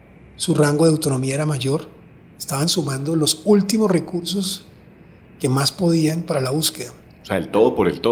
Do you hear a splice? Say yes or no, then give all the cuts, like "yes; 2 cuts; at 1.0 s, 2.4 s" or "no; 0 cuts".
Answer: no; 0 cuts